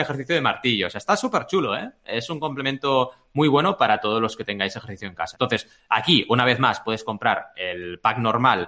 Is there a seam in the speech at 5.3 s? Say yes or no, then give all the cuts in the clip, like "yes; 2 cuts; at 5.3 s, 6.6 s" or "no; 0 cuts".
yes; 1 cut; at 5.3 s